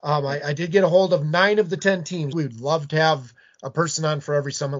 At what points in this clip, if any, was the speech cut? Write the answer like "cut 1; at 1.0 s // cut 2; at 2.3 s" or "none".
cut 1; at 2.3 s